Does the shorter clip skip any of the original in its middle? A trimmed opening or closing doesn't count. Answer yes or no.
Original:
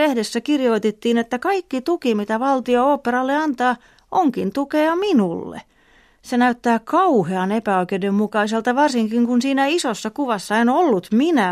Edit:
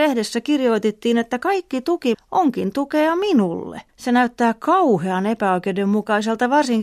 yes